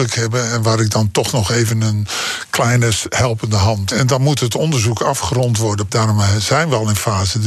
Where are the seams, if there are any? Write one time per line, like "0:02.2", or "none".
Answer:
0:03.9
0:05.9